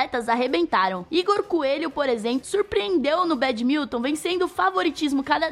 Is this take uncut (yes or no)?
yes